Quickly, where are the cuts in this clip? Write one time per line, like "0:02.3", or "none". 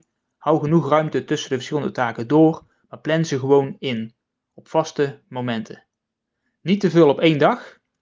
none